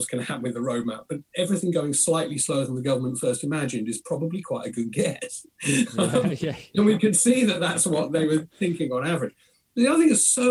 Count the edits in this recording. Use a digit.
0